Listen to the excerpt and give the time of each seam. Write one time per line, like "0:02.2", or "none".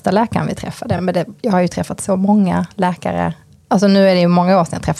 none